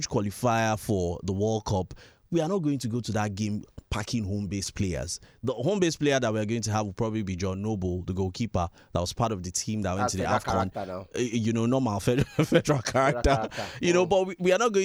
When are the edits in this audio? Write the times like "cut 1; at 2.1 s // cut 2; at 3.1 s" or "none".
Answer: none